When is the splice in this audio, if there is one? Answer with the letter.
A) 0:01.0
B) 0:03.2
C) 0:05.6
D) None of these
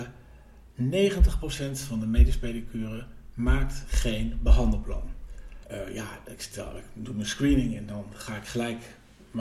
C